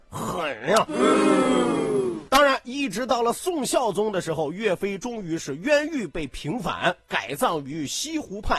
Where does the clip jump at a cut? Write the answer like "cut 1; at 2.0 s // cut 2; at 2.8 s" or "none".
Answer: none